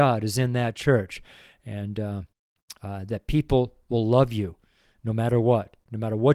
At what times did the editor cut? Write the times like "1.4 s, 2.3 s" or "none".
none

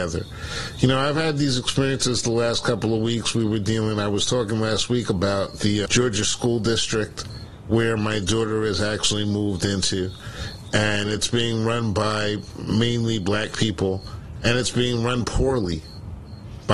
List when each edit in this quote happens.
5.9 s

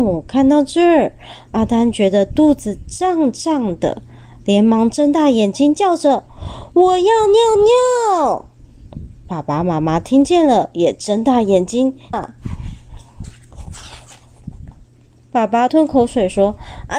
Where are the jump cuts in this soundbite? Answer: 12.1 s, 15.7 s

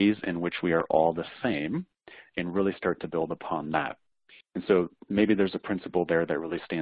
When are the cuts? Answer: none

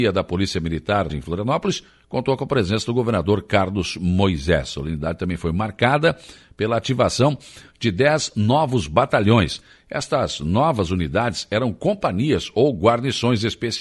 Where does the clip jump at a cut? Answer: 1.1 s

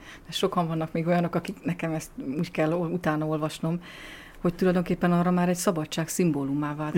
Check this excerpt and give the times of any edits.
none

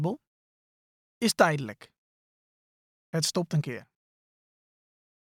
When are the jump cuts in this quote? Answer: none

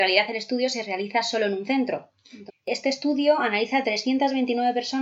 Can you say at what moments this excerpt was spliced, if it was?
2.5 s

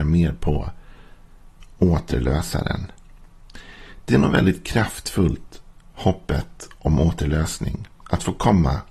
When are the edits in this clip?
none

